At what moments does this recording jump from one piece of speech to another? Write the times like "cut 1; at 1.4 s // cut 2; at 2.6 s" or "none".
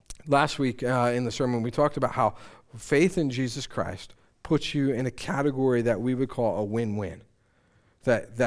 none